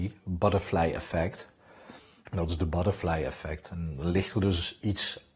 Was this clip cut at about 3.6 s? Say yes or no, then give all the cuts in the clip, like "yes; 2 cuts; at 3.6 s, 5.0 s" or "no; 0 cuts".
no; 1 cut; at 2.2 s